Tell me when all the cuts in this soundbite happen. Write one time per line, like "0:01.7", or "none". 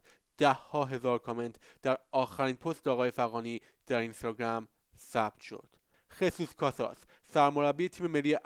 0:05.9